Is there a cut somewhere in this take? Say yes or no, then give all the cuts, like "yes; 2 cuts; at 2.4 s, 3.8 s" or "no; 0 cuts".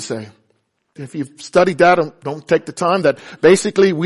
yes; 1 cut; at 1.0 s